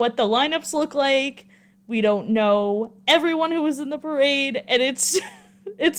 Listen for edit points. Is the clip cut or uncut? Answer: uncut